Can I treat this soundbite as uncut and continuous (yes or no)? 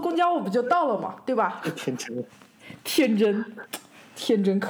yes